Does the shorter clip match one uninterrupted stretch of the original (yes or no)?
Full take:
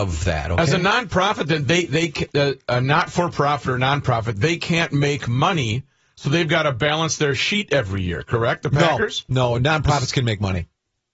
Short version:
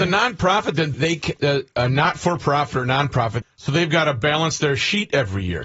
no